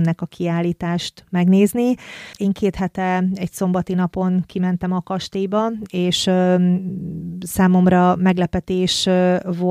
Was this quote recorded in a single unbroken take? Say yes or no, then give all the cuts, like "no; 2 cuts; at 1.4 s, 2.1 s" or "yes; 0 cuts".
no; 1 cut; at 2.4 s